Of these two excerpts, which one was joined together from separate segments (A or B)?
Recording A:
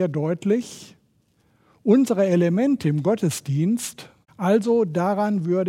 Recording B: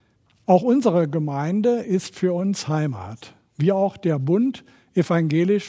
A